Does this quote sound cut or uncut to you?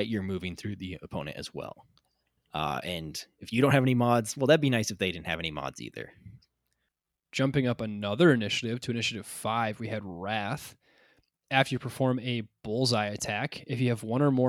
cut